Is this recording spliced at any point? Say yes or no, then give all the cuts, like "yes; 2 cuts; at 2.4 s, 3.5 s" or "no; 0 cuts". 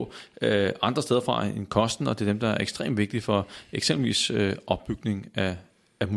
no; 0 cuts